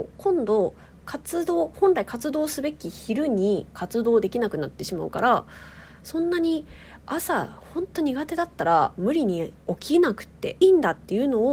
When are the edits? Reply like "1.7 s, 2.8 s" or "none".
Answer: 10.6 s